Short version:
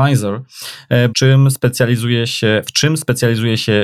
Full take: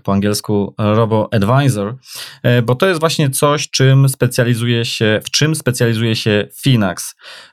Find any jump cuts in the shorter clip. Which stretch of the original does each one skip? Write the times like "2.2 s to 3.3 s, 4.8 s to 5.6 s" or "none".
2.7 s to 3.7 s